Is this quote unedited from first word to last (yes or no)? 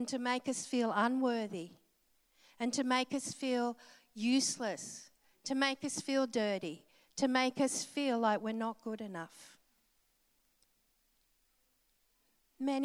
yes